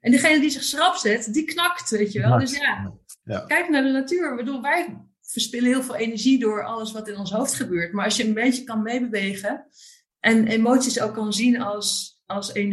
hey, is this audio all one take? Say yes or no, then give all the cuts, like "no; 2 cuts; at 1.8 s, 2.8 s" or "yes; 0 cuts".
yes; 0 cuts